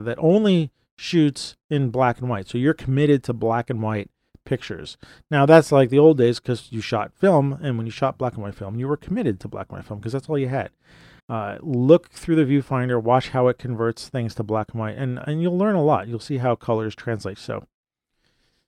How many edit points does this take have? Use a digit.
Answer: 2